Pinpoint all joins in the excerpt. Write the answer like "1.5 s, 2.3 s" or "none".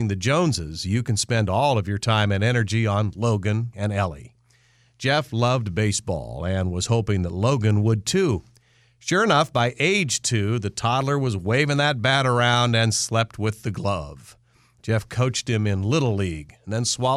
3.7 s